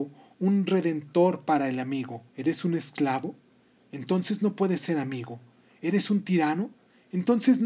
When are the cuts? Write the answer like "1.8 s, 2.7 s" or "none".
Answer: 2.3 s